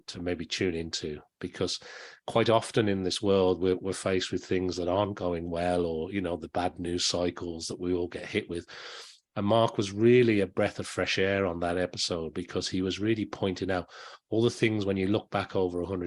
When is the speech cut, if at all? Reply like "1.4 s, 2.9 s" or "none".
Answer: none